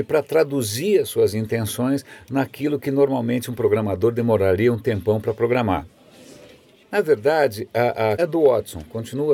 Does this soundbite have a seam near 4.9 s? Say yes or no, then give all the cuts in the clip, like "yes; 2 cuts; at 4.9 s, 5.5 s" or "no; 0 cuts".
no; 2 cuts; at 6.8 s, 8.2 s